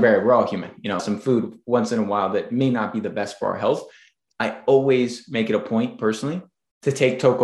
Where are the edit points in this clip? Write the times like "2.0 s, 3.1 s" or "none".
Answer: 1.0 s